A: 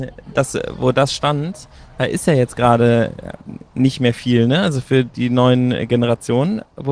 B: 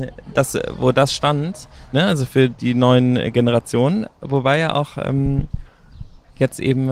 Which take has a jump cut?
B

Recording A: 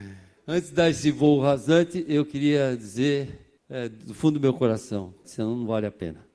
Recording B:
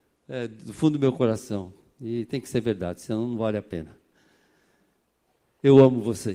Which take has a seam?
A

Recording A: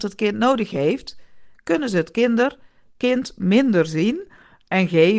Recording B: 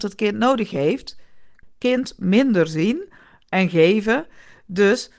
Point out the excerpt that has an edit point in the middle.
B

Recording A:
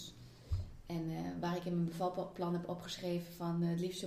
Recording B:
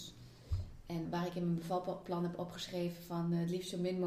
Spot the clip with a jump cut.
B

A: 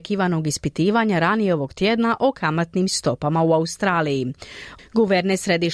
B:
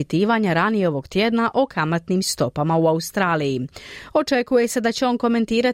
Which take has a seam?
A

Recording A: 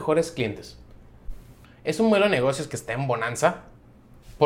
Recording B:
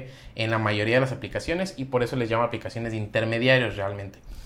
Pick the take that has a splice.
A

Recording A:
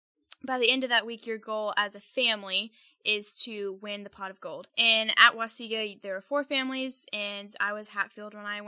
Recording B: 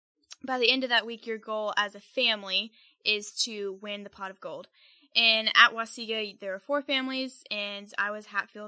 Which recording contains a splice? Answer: A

